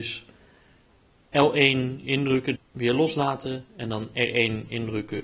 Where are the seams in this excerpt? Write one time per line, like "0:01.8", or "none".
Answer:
0:02.6